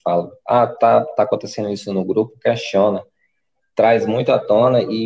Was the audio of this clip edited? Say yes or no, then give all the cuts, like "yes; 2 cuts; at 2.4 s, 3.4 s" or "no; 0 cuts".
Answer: no; 0 cuts